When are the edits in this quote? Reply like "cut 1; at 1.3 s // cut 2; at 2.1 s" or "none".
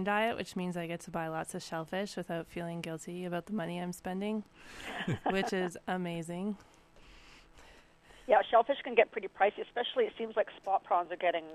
none